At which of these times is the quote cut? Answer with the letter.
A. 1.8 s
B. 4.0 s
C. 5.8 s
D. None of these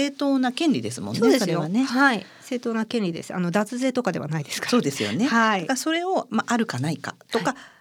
D